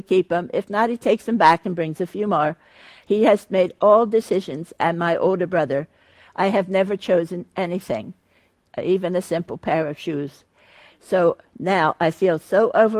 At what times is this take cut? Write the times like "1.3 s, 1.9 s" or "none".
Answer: none

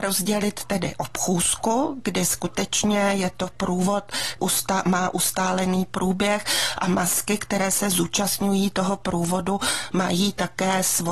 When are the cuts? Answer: 4.4 s

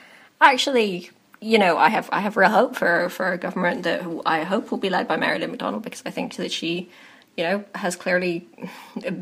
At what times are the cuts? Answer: none

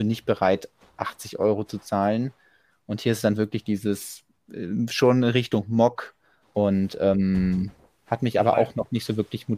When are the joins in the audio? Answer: 6.4 s, 8.1 s

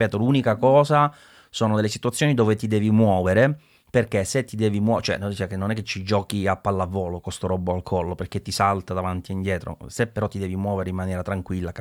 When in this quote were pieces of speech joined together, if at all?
none

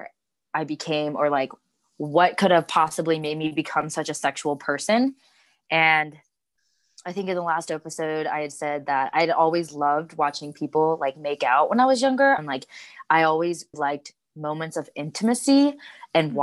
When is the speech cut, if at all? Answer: 12.4 s, 13.7 s

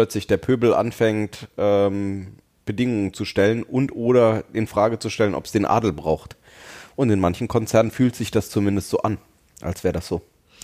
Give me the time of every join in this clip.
none

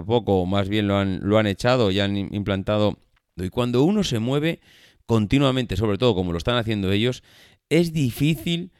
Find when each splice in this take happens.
3.4 s

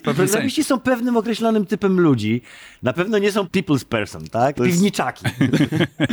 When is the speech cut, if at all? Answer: 3.4 s, 4.5 s

